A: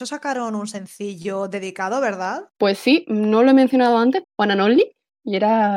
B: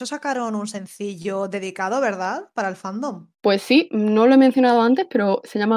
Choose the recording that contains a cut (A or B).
A